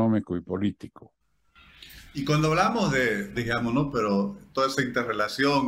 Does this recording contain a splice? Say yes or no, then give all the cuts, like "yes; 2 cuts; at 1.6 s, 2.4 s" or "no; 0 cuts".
yes; 1 cut; at 3.4 s